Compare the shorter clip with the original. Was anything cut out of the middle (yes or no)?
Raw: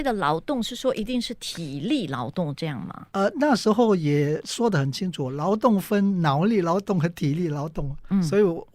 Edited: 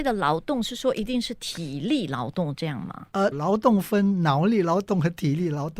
yes